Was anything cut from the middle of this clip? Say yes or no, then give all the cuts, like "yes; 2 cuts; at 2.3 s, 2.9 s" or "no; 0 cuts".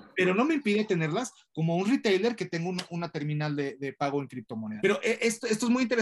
yes; 1 cut; at 4.8 s